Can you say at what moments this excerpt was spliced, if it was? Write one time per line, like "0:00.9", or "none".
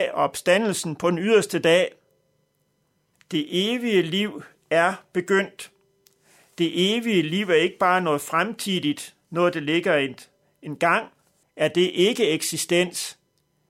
0:03.1
0:11.4

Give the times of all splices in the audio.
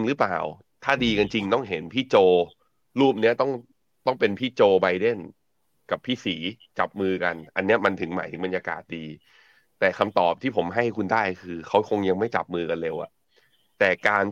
none

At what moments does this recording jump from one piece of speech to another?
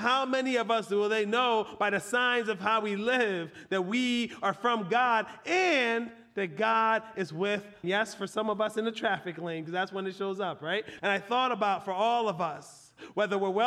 0:07.8
0:11.0

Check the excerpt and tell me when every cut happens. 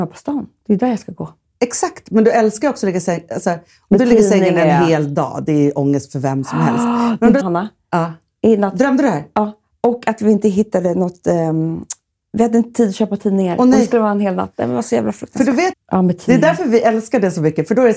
0:07.4
0:15.7

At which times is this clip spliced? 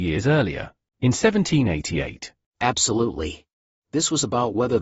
0:03.8

